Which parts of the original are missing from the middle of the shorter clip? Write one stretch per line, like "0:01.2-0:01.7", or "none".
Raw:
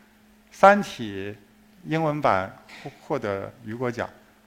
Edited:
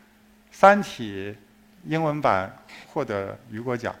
0:02.8-0:03.0